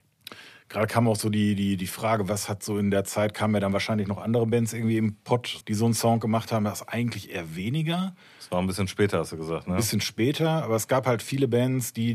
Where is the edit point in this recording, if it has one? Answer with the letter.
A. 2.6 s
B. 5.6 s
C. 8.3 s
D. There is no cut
B